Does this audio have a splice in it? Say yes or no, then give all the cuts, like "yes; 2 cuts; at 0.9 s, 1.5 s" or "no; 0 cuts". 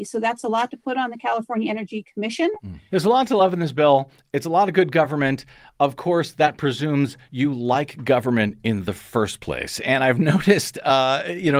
yes; 1 cut; at 2.9 s